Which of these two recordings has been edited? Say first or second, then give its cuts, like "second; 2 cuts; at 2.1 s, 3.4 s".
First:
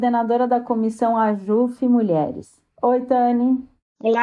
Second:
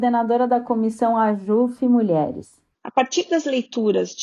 second; 1 cut; at 2.7 s